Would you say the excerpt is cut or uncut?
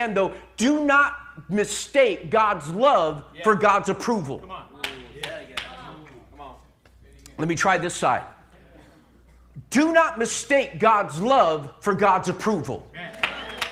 uncut